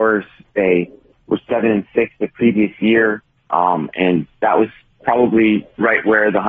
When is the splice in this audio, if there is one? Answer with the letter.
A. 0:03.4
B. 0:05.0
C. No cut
A